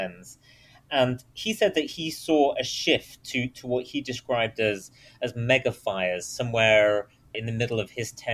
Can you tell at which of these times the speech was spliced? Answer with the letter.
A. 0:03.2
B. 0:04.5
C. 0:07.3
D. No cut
C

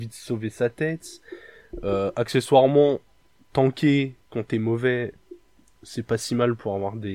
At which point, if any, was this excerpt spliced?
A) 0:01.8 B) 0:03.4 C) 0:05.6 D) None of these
D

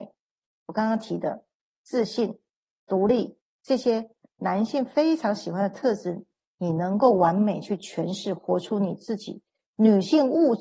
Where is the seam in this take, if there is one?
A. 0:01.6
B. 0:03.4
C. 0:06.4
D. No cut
B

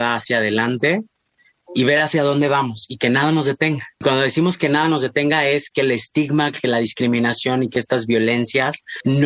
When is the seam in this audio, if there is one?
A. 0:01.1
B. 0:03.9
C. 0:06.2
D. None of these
D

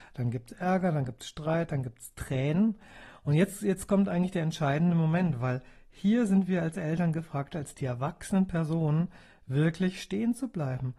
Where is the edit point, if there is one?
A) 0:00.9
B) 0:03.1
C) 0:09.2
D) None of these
D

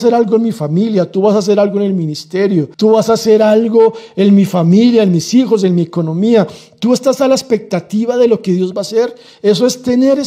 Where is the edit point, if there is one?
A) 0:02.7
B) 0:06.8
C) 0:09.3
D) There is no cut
A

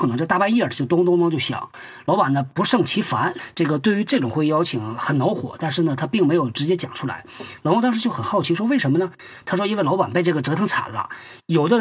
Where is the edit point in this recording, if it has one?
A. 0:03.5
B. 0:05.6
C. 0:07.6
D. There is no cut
C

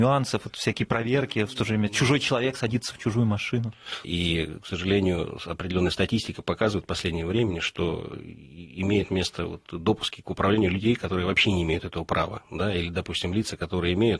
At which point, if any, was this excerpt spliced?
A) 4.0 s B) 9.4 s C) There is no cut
A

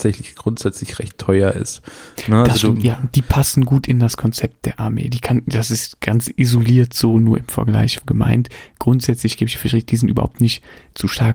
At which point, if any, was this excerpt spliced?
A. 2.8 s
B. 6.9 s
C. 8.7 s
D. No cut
D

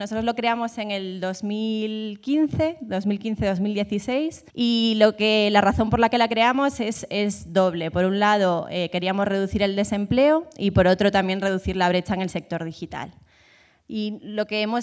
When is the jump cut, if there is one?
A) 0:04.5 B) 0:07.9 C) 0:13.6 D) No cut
A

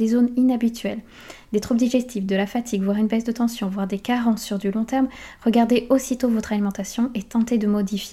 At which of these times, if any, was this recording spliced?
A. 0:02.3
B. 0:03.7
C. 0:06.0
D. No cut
D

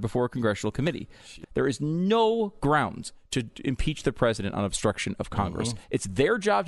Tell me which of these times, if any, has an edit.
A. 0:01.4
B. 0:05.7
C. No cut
A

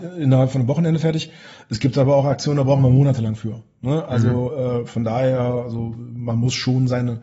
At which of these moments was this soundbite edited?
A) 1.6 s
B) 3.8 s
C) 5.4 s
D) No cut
D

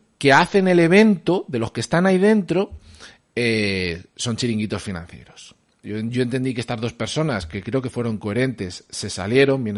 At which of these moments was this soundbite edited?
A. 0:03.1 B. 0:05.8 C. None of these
B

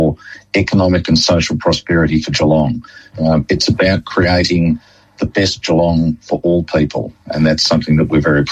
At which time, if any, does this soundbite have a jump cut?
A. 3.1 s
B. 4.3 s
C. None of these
A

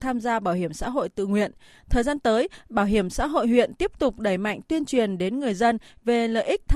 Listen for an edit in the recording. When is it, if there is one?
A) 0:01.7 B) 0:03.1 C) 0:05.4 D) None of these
D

